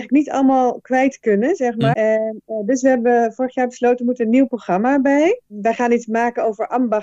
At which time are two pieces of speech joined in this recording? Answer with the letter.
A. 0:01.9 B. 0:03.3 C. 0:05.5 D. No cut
A